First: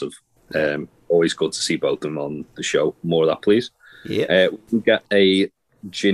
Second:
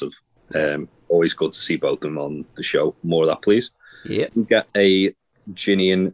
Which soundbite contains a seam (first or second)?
second